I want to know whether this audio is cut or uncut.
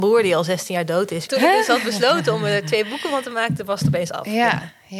cut